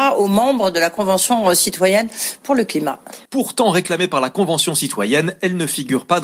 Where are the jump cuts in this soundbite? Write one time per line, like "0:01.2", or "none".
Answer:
0:03.3